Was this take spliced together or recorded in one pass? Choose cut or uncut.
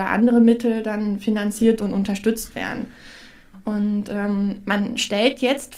cut